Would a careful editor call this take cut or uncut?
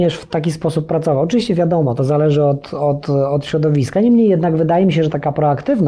uncut